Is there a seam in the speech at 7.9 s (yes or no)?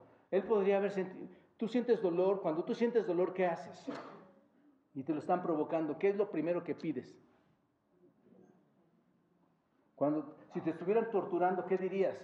no